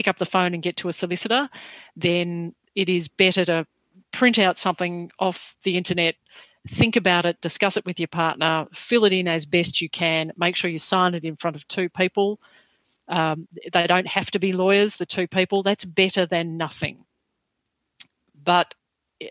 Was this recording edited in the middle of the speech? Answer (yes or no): no